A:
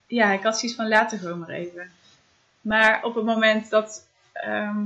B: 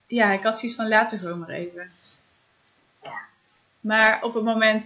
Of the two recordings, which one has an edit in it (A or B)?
A